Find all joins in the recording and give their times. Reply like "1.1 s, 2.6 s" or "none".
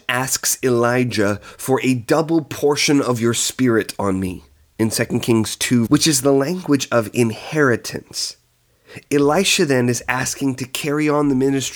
5.9 s, 9.1 s